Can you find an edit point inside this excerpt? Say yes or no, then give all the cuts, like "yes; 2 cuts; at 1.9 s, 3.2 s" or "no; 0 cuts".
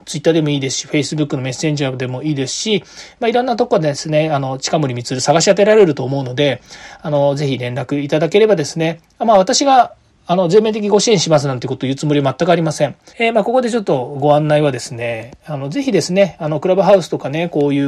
yes; 1 cut; at 13.1 s